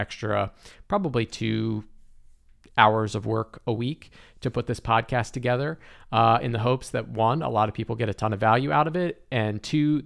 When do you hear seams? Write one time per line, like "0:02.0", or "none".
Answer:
none